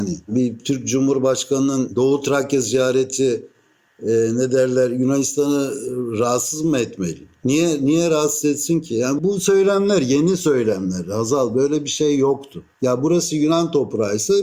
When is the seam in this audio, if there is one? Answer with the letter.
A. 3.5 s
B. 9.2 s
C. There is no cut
B